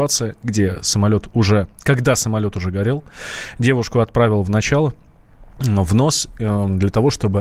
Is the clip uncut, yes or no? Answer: yes